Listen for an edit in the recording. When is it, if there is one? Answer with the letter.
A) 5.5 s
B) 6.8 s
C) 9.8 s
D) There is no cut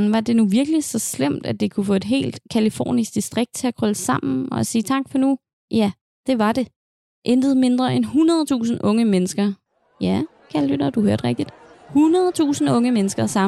D